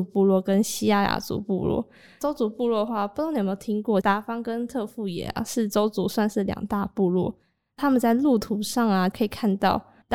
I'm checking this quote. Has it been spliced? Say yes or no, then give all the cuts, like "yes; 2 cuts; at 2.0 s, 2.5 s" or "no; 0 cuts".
no; 0 cuts